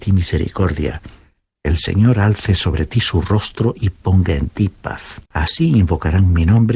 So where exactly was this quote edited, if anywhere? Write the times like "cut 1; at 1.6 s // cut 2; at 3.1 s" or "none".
cut 1; at 5.2 s